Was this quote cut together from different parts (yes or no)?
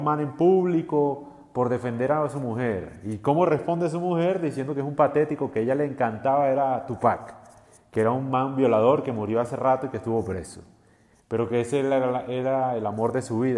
no